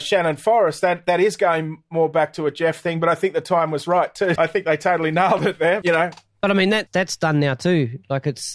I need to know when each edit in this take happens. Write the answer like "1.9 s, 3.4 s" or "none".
4.4 s, 5.8 s, 6.9 s